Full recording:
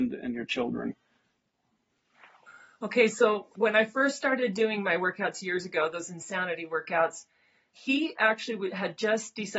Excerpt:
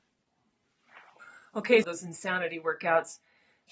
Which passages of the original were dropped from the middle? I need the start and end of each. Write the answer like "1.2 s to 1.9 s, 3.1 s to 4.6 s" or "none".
3.1 s to 5.9 s

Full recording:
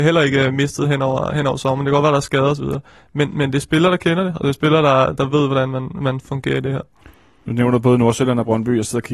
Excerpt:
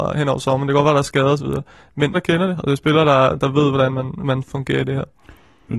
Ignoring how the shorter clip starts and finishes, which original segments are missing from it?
3.3 s to 3.9 s

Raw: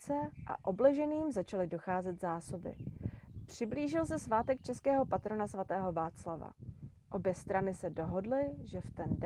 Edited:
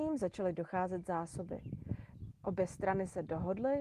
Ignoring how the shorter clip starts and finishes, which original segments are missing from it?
3.5 s to 7.0 s

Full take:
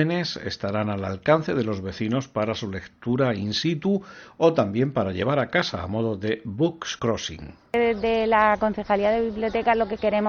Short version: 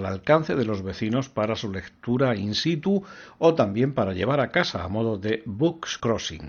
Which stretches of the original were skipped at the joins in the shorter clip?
none

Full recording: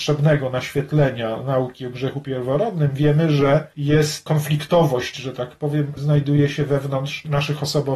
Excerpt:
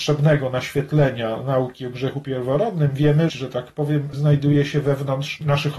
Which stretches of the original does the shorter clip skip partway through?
3.3 s to 5.1 s

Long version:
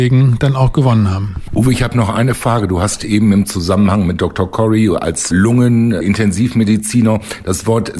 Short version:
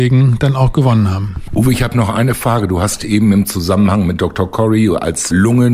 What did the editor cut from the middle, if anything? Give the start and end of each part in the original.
none

